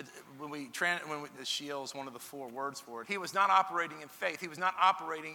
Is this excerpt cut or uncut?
cut